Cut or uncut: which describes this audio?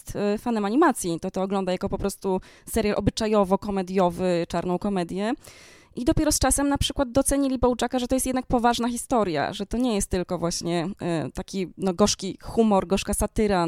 uncut